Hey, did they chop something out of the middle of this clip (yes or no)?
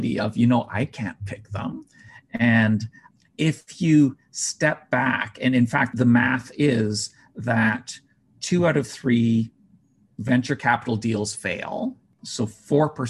yes